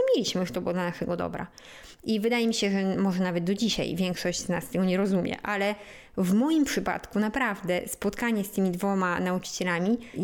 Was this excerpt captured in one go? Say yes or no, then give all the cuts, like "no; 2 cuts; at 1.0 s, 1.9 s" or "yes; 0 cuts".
yes; 0 cuts